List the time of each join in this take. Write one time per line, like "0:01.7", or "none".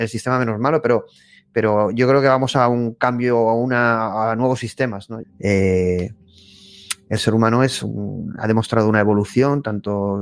0:05.2
0:08.4